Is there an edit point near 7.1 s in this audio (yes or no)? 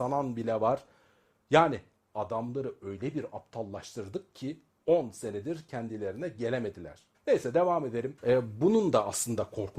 yes